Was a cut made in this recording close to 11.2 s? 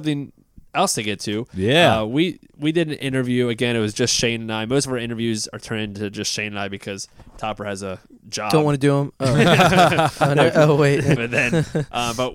yes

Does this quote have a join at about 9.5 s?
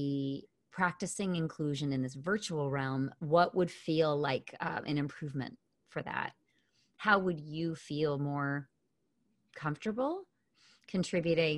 no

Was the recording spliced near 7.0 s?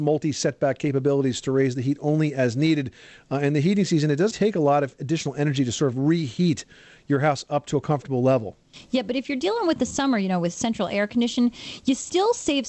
no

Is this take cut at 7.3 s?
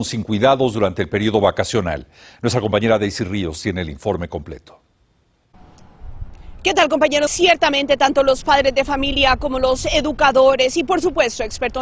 yes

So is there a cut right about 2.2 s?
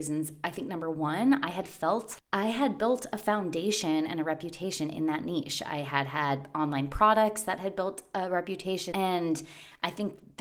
yes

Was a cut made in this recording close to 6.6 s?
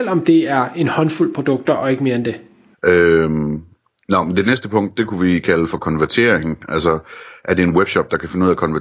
no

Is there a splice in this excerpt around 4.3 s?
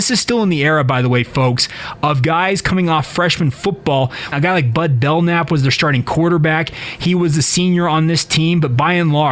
yes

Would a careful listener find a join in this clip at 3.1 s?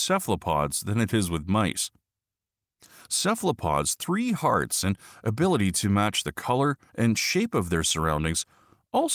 yes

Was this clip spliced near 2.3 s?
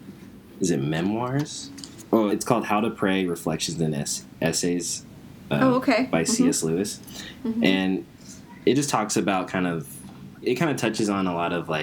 yes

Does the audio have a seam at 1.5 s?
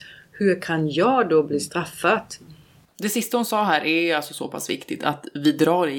no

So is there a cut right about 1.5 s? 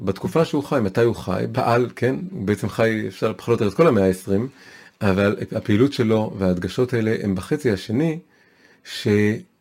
yes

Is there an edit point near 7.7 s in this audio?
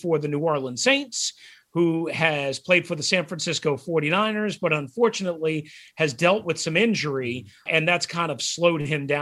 yes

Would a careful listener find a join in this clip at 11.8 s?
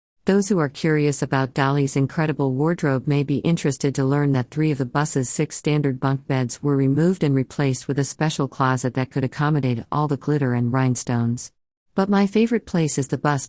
yes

